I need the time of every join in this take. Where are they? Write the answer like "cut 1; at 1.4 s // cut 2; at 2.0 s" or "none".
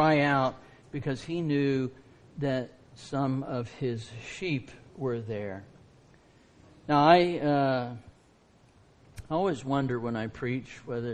none